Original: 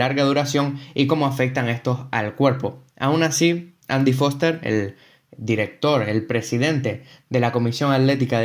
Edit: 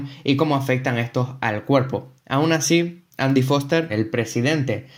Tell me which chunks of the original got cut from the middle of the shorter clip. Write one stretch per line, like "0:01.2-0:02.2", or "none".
0:04.6-0:06.1